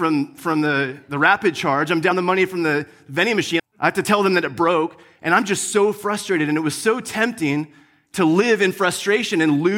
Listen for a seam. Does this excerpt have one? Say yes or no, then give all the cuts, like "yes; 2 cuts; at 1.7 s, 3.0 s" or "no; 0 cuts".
yes; 1 cut; at 3.6 s